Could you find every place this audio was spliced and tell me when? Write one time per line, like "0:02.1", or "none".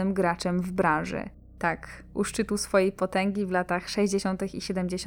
0:01.4